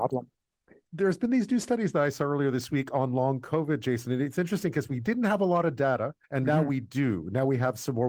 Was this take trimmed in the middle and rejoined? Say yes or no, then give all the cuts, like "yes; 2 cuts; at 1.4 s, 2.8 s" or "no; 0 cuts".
yes; 1 cut; at 6.2 s